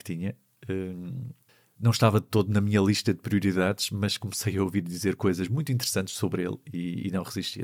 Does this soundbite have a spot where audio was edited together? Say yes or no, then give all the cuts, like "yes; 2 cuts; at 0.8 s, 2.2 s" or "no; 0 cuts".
no; 0 cuts